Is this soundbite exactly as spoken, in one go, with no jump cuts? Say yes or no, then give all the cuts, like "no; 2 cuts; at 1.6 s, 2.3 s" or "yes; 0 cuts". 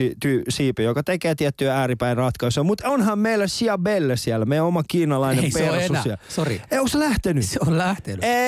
yes; 0 cuts